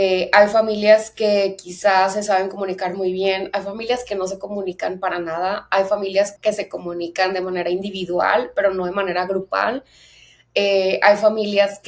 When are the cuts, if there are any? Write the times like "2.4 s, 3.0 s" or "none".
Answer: 6.4 s